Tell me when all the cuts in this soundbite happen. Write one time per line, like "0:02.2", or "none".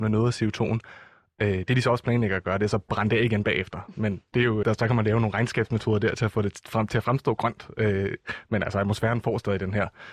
0:04.6